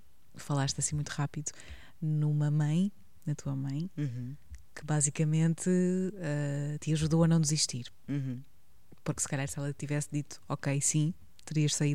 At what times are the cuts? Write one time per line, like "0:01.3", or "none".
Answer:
none